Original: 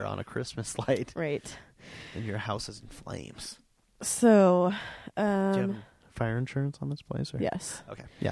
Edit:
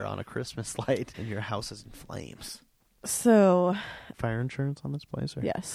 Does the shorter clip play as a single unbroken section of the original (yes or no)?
no